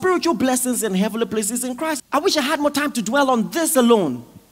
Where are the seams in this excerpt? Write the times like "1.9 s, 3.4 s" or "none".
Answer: 2.0 s